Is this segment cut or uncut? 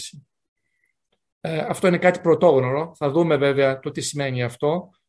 uncut